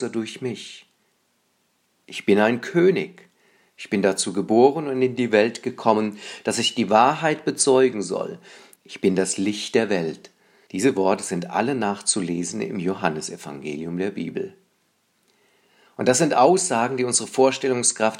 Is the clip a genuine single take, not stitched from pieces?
no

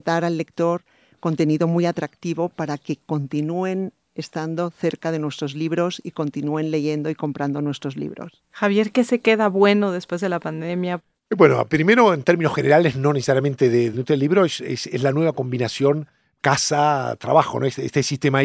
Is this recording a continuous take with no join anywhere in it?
no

